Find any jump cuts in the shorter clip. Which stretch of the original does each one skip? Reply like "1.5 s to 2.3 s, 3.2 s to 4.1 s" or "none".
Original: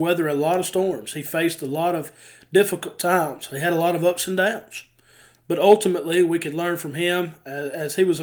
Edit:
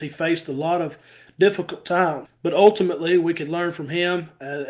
3.4 s to 5.3 s